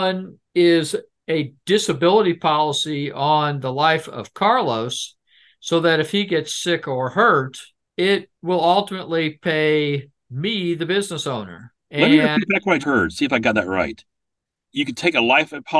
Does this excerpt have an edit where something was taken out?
yes; 1 cut; at 12.8 s

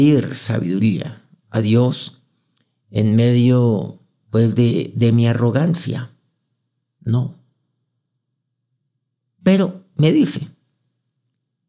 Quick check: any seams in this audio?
no; 0 cuts

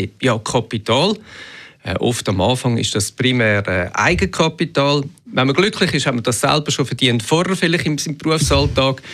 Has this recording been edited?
no; 0 cuts

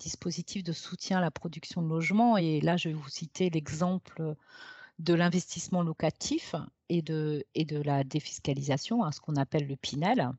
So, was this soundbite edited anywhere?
no; 0 cuts

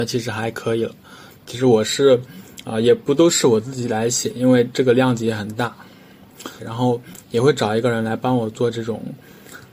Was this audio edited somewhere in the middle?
yes; 2 cuts; at 1.3 s, 6.6 s

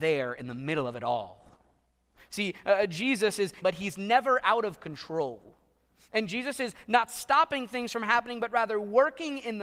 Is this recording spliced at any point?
yes; 1 cut; at 3.6 s

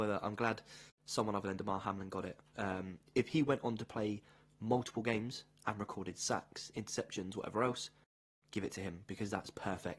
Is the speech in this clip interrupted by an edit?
no; 0 cuts

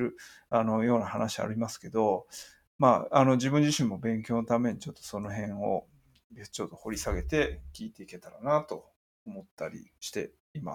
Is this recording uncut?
yes; 0 cuts

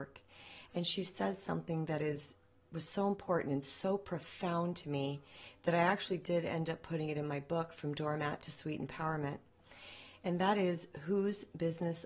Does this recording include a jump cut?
no; 0 cuts

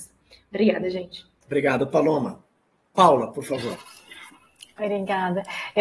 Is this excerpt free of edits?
yes; 0 cuts

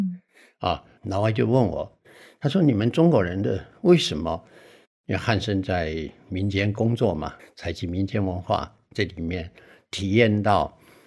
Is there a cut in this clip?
yes; 3 cuts; at 1.0 s, 5.0 s, 7.4 s

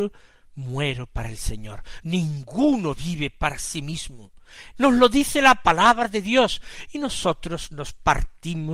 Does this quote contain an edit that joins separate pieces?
yes; 2 cuts; at 2.0 s, 4.8 s

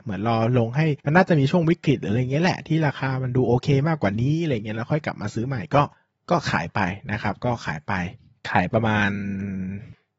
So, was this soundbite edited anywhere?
yes; 1 cut; at 8.7 s

